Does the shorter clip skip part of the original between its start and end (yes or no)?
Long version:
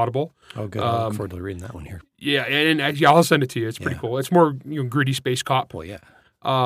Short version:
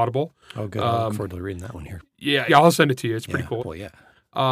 yes